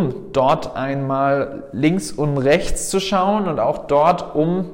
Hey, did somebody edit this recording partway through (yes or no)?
no